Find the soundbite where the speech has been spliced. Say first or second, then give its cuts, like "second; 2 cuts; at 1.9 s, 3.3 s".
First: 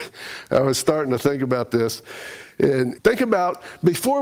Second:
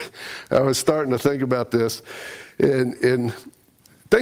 first; 1 cut; at 3.0 s